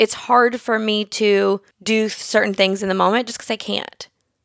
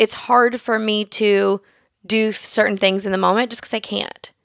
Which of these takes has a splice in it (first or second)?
first